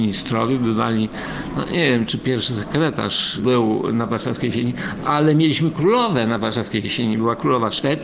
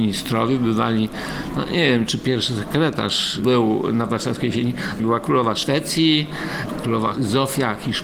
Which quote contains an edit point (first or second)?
second